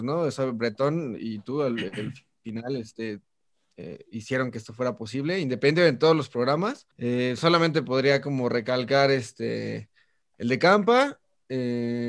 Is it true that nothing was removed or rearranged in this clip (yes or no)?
no